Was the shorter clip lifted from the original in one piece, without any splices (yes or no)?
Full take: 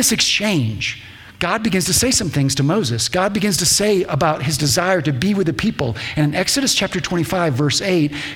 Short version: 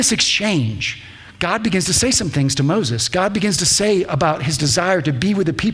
yes